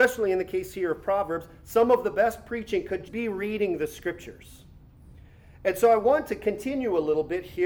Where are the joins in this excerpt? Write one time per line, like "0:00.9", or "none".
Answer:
0:03.0